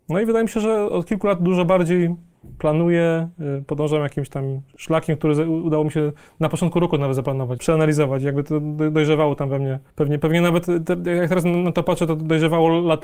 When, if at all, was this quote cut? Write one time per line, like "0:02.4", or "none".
0:07.6